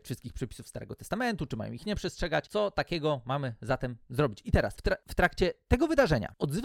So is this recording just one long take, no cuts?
yes; 0 cuts

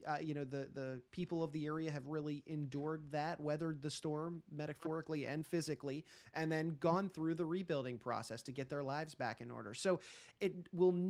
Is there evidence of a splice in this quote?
yes; 1 cut; at 1.1 s

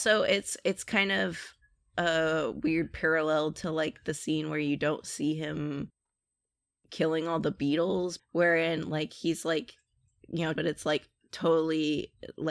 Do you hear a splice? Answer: yes; 2 cuts; at 8.2 s, 10.6 s

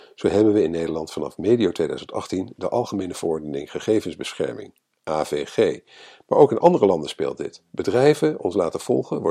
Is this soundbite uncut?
yes; 0 cuts

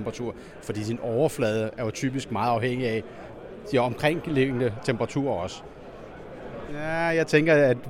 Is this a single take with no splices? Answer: no; 1 cut; at 6.7 s

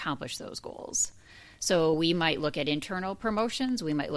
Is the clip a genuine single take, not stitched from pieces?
yes; 0 cuts

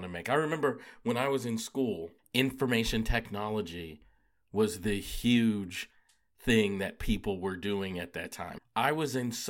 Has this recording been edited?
yes; 2 cuts; at 2.2 s, 8.6 s

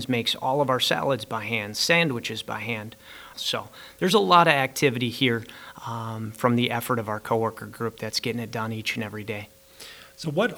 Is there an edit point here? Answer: yes; 1 cut; at 3.3 s

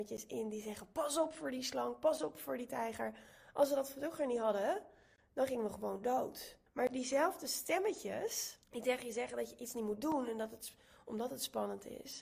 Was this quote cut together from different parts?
yes; 2 cuts; at 6.7 s, 8.6 s

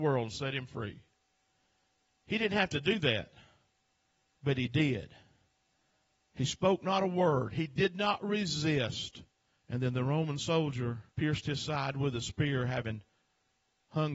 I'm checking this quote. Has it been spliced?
yes; 2 cuts; at 9.5 s, 11.1 s

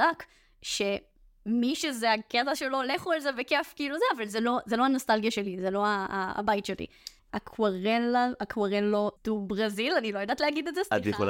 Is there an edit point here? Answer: yes; 2 cuts; at 7.2 s, 9.2 s

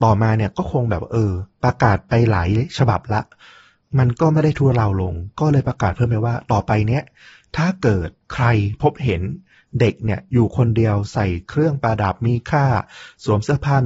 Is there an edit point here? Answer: no; 0 cuts

